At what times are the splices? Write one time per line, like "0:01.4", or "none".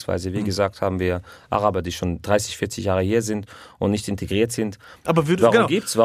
0:05.0

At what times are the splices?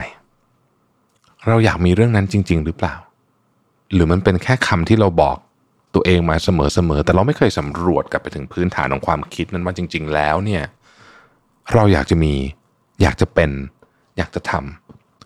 none

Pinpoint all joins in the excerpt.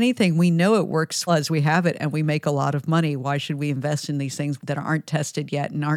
0:01.3

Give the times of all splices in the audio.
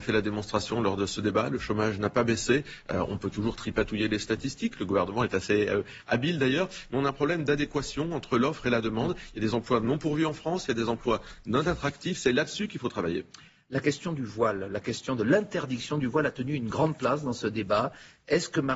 none

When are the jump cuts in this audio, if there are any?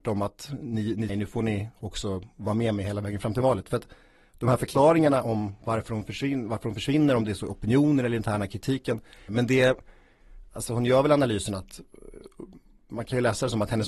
0:01.1
0:09.3

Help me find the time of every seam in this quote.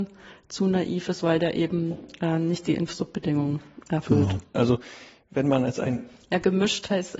0:04.5

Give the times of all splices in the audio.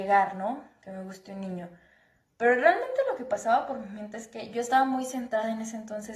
none

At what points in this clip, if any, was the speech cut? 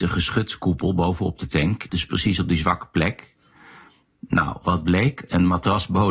0:01.9

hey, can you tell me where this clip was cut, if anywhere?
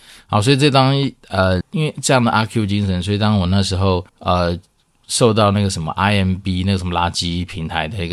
0:01.6
0:04.1

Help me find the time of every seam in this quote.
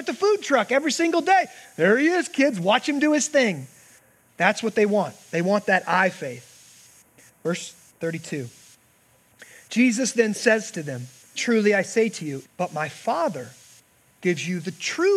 0:11.3
0:12.4

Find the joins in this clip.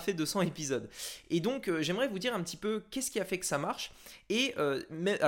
none

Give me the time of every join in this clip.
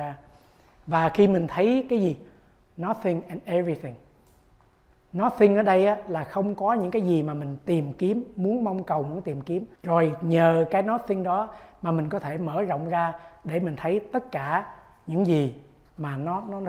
0:09.7

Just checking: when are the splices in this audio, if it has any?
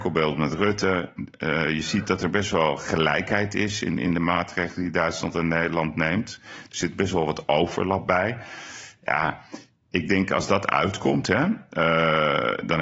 none

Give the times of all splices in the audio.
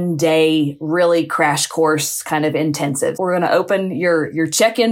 0:03.1

